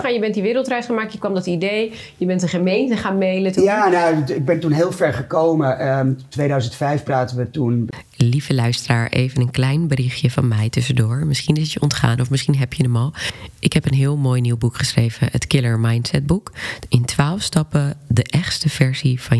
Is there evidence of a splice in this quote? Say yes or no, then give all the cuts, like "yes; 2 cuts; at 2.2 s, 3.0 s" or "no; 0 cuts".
no; 0 cuts